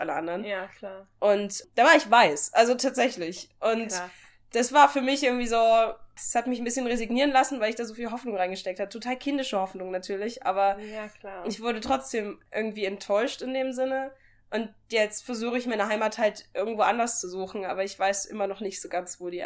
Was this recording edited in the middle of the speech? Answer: no; 0 cuts

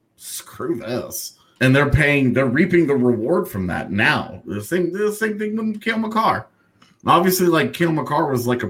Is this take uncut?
no; 1 cut; at 1.5 s

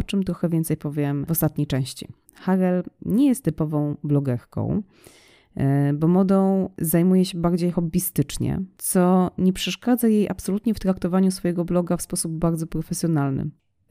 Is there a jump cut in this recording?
yes; 2 cuts; at 2.2 s, 8.7 s

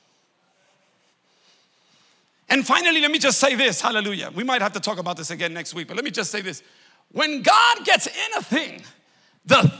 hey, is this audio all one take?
yes; 0 cuts

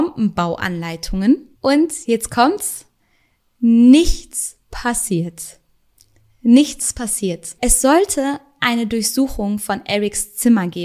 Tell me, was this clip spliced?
yes; 1 cut; at 7.6 s

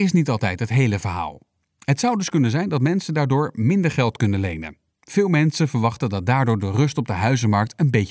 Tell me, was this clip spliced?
yes; 2 cuts; at 1.6 s, 4.9 s

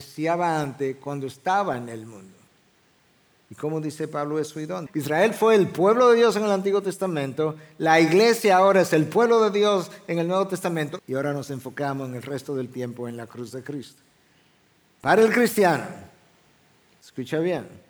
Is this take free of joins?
no; 2 cuts; at 4.9 s, 11.0 s

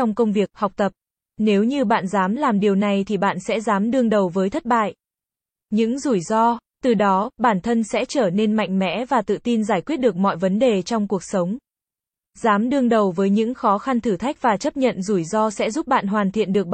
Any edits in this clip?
yes; 1 cut; at 1.2 s

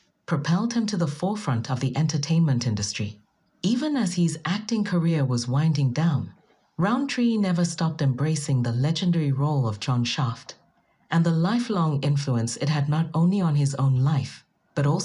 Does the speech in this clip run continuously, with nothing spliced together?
yes; 0 cuts

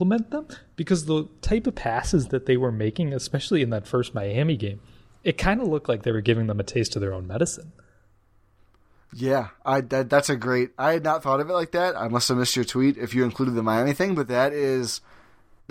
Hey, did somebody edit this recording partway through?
no; 0 cuts

